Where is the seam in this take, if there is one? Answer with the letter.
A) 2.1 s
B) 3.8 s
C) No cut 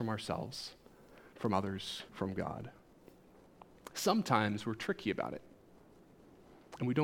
A